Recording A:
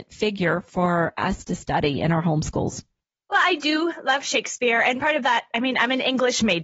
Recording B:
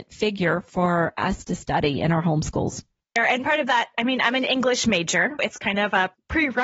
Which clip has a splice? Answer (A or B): B